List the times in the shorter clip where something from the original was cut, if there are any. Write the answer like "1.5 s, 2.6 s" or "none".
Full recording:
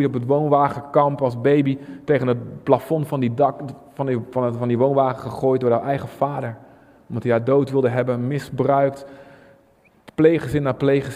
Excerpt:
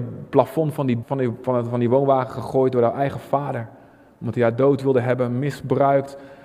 1.0 s